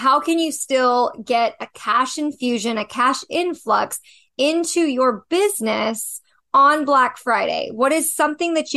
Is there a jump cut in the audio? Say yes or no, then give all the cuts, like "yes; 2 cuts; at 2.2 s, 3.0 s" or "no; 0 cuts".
no; 0 cuts